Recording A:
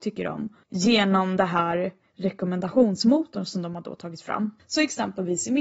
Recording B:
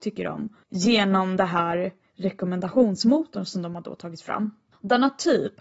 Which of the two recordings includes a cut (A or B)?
A